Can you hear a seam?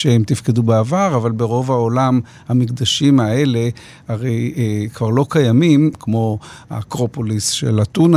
yes; 1 cut; at 5.9 s

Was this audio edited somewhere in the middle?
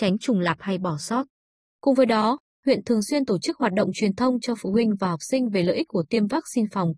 no; 0 cuts

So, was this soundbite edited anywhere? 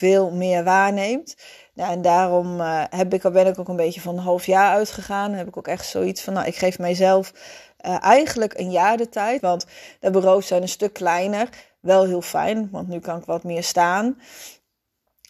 yes; 1 cut; at 9.4 s

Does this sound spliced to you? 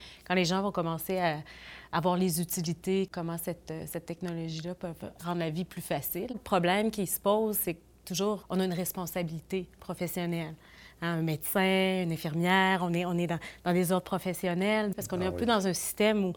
yes; 2 cuts; at 8.4 s, 14.9 s

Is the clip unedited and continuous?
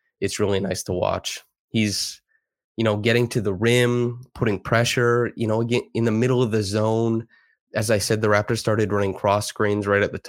yes; 0 cuts

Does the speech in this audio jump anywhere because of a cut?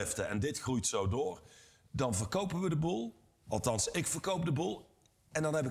no; 0 cuts

